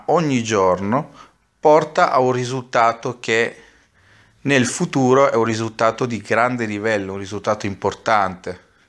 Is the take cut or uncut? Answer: uncut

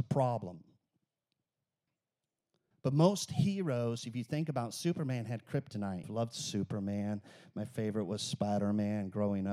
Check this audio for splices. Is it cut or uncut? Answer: cut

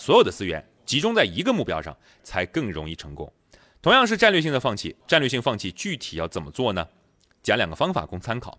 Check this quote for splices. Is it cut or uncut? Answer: cut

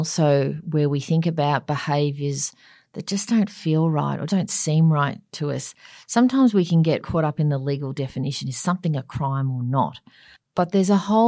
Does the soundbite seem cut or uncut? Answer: cut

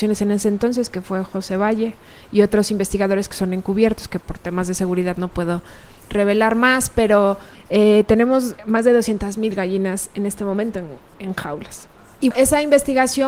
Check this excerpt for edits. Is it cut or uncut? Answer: cut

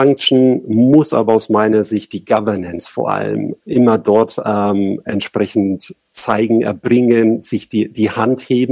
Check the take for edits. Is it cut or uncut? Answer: uncut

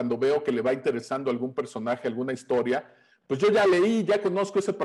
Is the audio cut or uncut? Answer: uncut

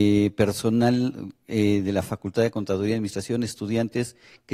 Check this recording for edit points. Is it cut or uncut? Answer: uncut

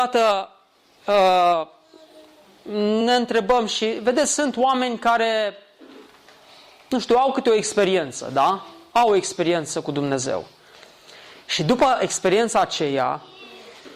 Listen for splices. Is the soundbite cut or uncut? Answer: uncut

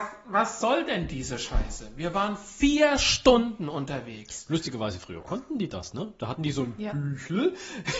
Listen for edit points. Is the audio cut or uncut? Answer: uncut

